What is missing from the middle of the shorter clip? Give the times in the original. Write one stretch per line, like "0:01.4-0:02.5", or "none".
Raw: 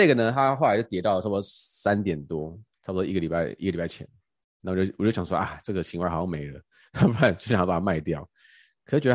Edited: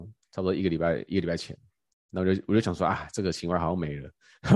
none